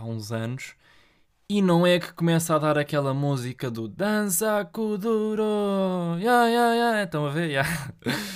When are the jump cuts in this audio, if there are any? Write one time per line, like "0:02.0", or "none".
none

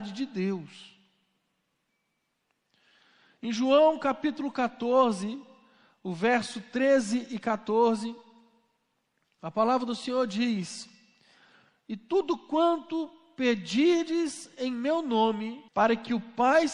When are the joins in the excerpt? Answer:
0:15.7

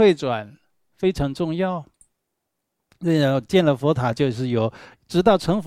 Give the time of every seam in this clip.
none

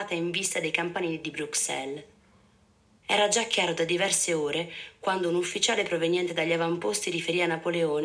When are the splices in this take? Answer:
0:03.0

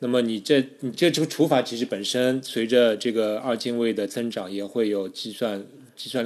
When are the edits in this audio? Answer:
none

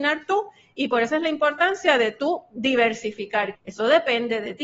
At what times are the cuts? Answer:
0:03.5

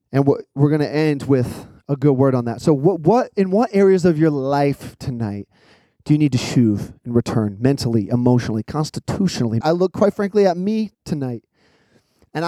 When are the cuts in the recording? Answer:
0:09.6
0:10.9

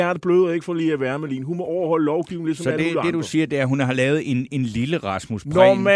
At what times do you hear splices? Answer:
none

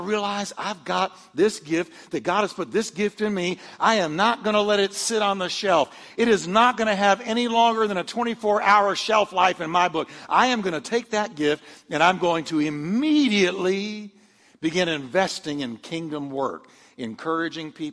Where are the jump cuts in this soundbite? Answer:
none

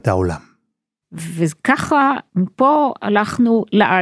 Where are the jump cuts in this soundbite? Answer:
0:01.0

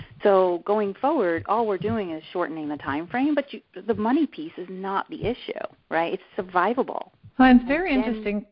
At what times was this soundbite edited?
0:07.3

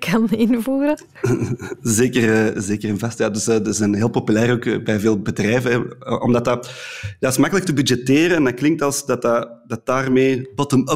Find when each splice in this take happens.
none

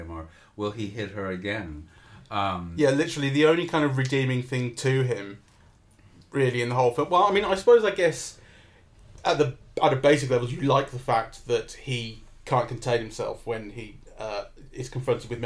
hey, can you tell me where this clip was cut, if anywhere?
none

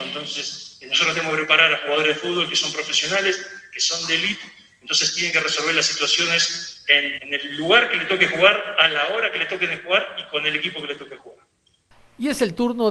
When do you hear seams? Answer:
0:07.2

